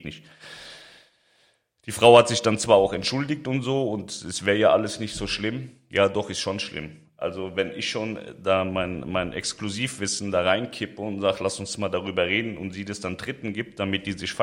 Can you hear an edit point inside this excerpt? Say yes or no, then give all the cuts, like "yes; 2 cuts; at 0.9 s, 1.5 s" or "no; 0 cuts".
no; 0 cuts